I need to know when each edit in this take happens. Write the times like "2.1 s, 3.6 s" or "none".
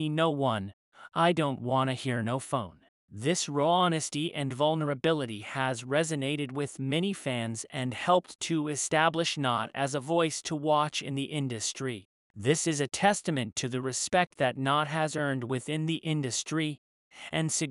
12.3 s

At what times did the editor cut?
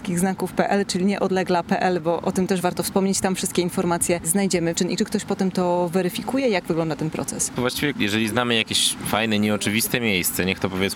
4.7 s, 7.6 s

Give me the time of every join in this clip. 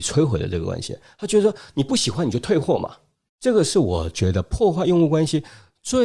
none

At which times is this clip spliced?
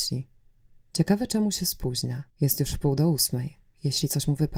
2.3 s

